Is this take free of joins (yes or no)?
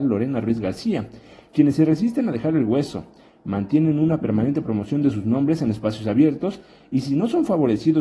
yes